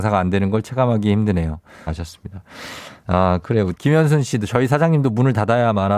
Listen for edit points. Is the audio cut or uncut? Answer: cut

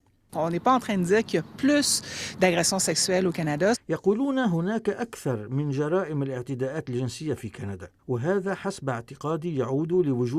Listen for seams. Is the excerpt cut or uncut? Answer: cut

